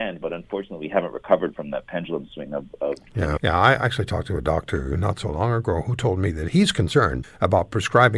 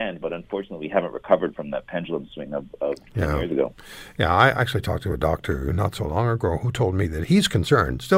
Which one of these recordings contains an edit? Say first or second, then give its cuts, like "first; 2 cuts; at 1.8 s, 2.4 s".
first; 2 cuts; at 3.4 s, 7.2 s